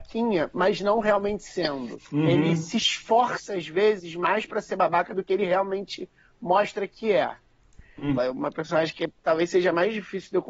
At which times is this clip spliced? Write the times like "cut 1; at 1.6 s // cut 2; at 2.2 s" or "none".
cut 1; at 2.0 s // cut 2; at 8.2 s